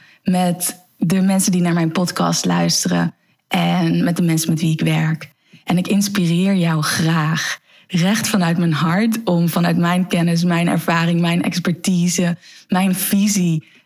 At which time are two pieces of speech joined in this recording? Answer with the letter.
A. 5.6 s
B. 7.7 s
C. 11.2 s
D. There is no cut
D